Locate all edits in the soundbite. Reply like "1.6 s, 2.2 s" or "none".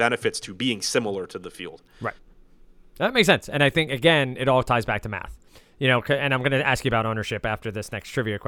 none